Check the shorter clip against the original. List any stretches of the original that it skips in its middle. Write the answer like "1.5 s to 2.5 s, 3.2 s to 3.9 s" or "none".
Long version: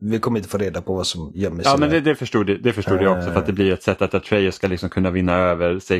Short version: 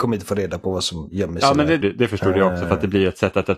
2.0 s to 2.5 s

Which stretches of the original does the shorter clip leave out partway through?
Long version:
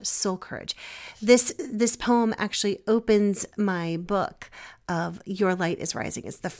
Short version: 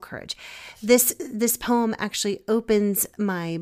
none

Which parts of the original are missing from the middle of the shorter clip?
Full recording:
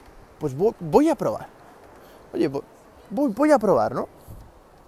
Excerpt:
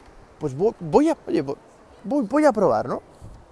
1.1 s to 2.2 s

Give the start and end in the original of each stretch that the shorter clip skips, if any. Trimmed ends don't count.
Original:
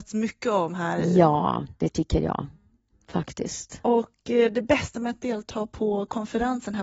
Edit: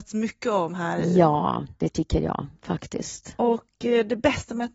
2.6 s to 3.0 s

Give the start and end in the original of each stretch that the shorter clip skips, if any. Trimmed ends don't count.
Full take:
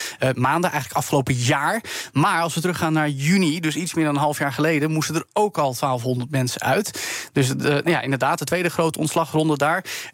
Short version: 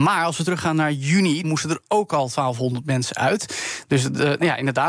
3.6 s to 4.9 s

